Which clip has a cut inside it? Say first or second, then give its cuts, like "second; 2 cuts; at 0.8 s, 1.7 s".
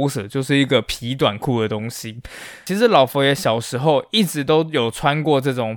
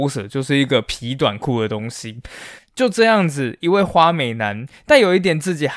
second; 1 cut; at 2.6 s